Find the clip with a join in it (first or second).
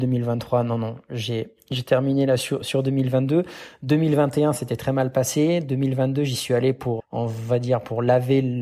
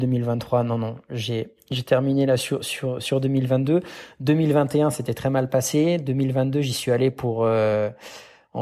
first